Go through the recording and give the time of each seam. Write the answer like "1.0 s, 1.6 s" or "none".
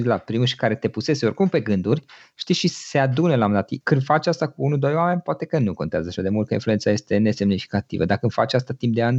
3.8 s